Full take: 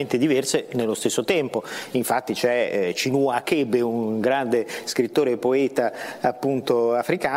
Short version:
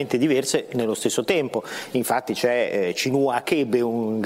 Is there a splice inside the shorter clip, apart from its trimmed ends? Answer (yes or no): no